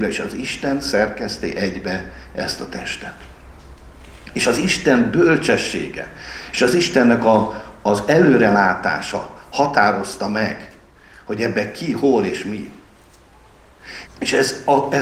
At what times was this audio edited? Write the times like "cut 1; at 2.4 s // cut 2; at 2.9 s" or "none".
cut 1; at 14.1 s